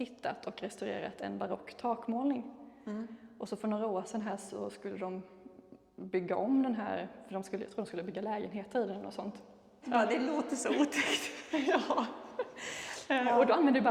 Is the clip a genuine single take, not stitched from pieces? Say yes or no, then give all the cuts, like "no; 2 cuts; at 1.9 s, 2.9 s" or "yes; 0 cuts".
no; 1 cut; at 9.8 s